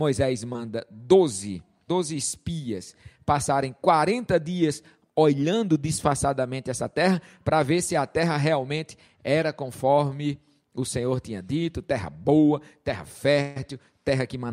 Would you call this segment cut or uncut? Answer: cut